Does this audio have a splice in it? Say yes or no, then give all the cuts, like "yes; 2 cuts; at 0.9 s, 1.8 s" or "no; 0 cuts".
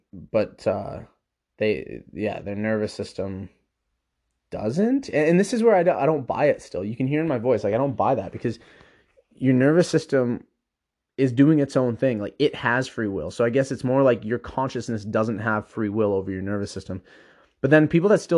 no; 0 cuts